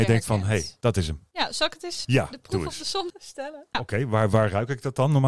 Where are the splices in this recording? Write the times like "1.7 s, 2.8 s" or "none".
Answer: 2.0 s, 3.7 s